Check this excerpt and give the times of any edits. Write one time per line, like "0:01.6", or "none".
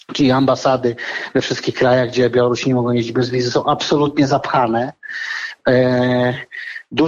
none